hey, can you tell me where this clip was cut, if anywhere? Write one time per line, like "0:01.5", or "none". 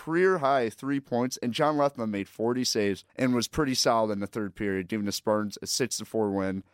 0:03.1